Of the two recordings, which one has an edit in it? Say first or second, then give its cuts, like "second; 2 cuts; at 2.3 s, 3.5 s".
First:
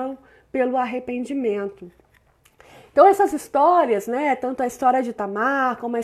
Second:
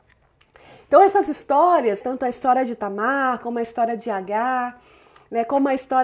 second; 1 cut; at 2.0 s